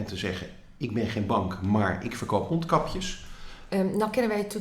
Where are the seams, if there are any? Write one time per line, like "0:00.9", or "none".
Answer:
0:03.7